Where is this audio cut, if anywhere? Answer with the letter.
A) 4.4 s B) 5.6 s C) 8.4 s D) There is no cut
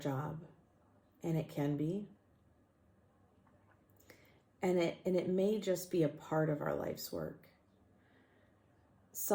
D